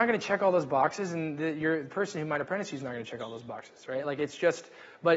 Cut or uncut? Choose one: uncut